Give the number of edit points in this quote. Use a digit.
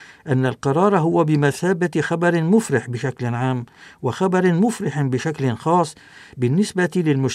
0